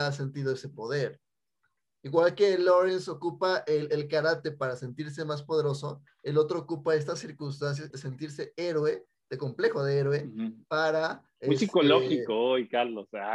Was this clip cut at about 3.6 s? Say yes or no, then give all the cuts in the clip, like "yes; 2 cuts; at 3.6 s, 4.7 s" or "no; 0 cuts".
no; 1 cut; at 7.9 s